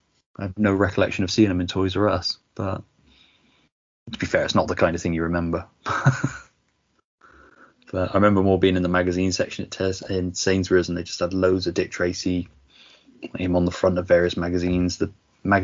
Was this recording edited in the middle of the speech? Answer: no; 0 cuts

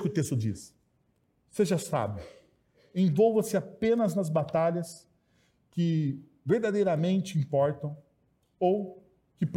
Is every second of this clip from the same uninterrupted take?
yes; 0 cuts

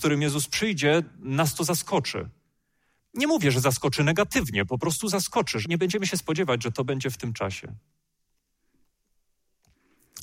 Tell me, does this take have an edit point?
yes; 1 cut; at 5.7 s

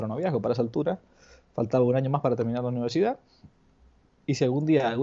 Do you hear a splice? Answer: no; 0 cuts

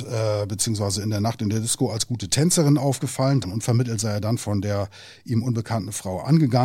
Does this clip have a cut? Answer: yes; 1 cut; at 3.4 s

